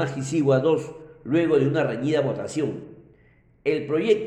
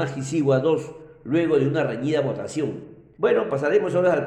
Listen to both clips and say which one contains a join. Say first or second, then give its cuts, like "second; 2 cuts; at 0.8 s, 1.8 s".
second; 1 cut; at 3.1 s